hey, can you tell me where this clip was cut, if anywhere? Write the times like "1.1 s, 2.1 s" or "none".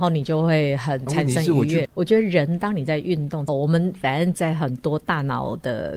1.8 s, 3.5 s